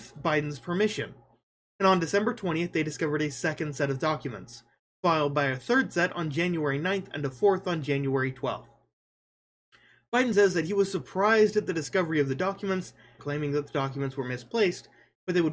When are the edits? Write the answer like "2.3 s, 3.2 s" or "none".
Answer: 13.2 s